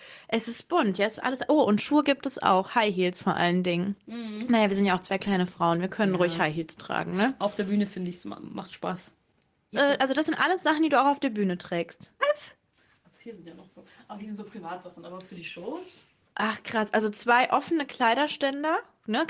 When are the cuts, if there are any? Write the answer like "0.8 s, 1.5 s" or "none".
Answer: 9.7 s, 12.2 s